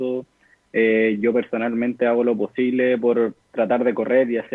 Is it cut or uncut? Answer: cut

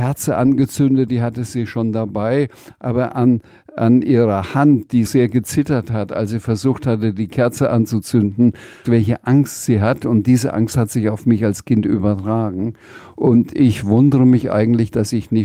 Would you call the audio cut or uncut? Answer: cut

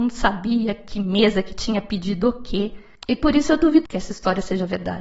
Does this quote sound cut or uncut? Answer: cut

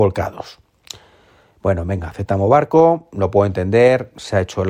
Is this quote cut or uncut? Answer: uncut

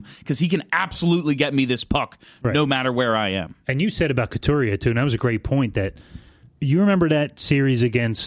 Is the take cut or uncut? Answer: cut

